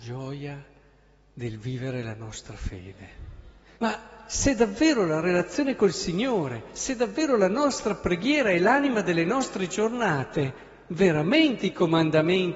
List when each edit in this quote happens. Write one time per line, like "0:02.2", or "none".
0:03.8